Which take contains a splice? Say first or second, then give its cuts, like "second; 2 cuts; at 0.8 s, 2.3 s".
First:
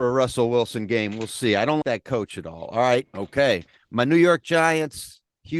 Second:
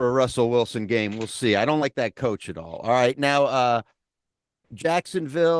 first; 2 cuts; at 1.8 s, 3.0 s